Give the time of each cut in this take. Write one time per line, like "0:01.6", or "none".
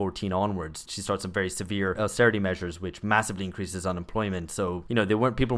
none